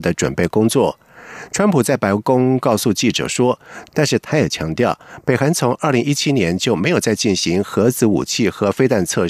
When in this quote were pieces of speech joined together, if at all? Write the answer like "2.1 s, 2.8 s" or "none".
3.9 s